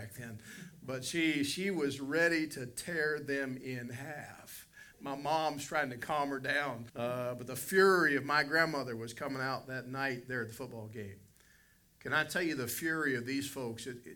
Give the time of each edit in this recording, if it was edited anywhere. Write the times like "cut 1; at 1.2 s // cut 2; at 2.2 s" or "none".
cut 1; at 6.9 s